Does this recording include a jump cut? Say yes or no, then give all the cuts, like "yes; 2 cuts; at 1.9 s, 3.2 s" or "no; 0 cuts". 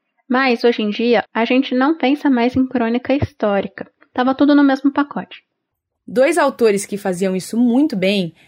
yes; 3 cuts; at 1.2 s, 4.1 s, 5.9 s